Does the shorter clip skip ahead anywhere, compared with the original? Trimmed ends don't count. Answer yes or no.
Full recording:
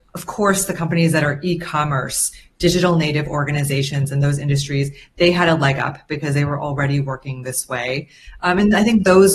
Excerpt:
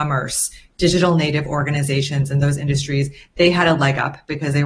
no